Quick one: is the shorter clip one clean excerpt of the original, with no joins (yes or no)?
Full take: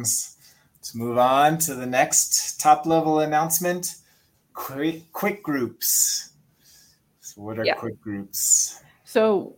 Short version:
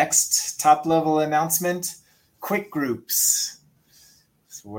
no